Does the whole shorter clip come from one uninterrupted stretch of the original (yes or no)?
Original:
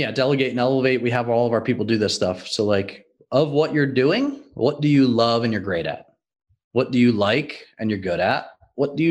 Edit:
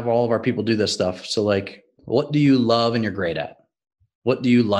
no